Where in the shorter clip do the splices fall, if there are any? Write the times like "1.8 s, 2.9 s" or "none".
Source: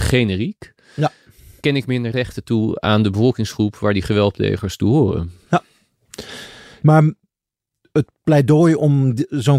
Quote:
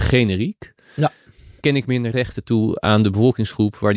none